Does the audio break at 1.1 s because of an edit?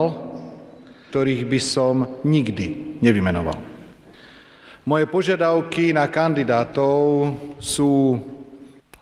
yes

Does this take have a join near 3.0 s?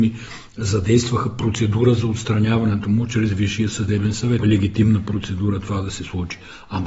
no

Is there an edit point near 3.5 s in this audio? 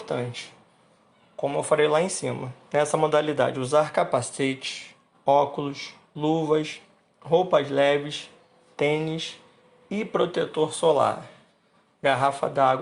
no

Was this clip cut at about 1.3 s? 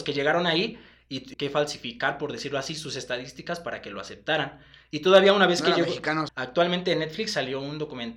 yes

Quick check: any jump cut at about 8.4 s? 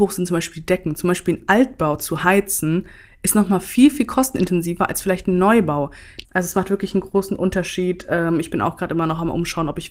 no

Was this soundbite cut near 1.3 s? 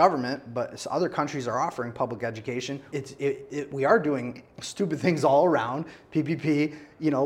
no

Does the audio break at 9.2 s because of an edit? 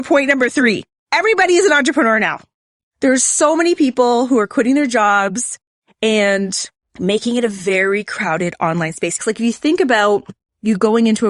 yes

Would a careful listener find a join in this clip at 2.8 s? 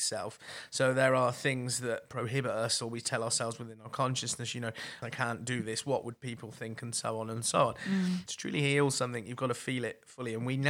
no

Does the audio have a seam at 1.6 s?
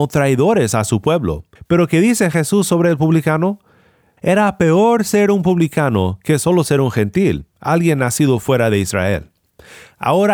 yes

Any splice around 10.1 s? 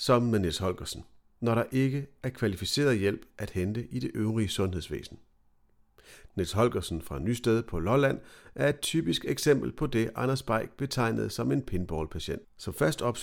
no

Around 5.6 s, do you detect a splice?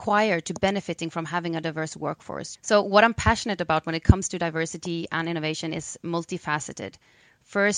no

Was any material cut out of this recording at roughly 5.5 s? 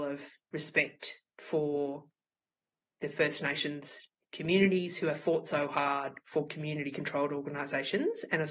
no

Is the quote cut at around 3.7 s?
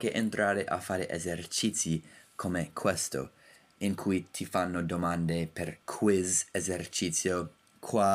no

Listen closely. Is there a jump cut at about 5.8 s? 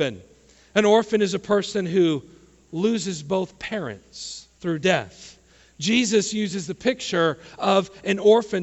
no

